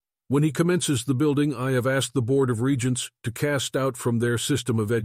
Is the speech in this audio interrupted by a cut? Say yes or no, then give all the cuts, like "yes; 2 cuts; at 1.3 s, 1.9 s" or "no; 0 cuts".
no; 0 cuts